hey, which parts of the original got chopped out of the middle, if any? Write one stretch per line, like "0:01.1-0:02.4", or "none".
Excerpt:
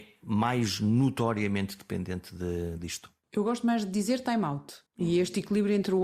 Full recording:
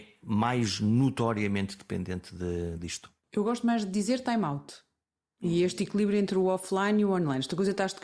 0:04.9-0:05.3